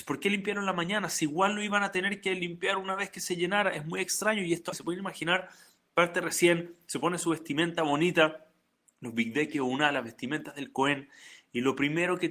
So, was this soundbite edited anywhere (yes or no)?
yes